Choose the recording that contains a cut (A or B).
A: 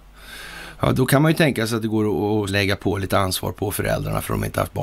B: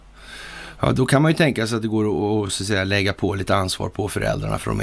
A